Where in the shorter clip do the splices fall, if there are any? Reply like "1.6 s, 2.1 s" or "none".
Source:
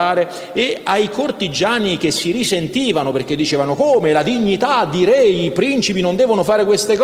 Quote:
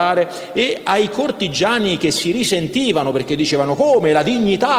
none